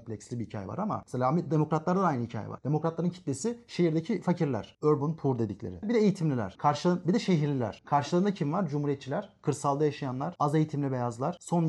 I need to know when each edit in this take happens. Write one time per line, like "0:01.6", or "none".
0:05.8